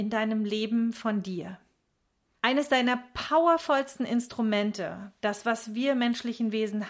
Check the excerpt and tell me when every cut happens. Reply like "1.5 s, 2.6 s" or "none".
2.4 s